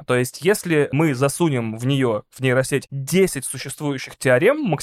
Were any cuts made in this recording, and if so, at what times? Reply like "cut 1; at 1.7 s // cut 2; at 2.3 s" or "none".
none